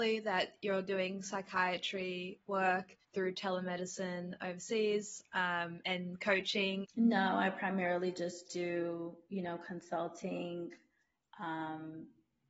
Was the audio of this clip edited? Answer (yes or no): yes